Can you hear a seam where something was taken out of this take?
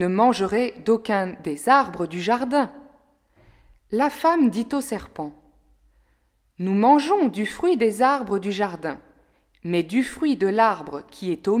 no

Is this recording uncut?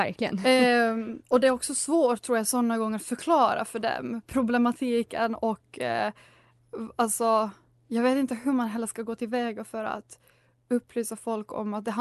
yes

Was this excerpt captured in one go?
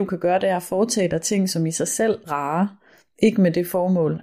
no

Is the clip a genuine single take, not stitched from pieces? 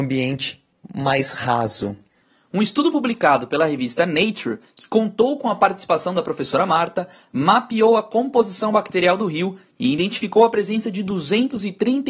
yes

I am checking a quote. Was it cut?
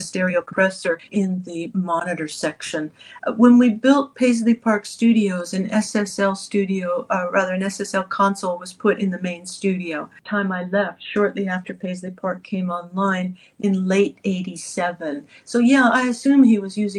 no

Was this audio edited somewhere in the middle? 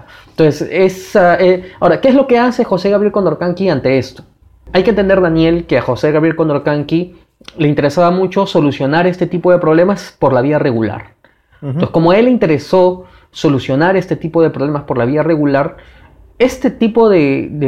no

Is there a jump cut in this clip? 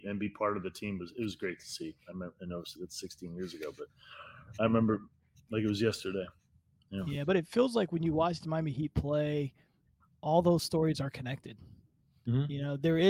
yes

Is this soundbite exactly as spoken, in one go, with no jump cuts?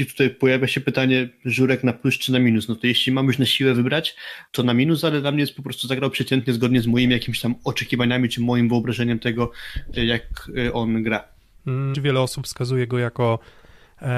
no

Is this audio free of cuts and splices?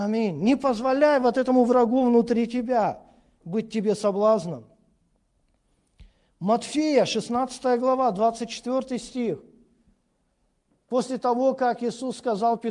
yes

